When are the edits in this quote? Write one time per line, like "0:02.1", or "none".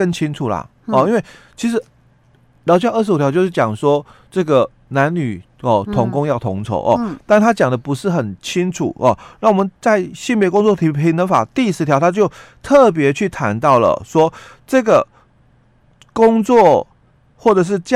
none